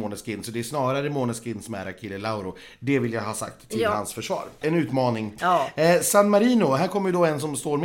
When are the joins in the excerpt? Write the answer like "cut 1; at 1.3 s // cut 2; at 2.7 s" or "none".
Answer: cut 1; at 4.6 s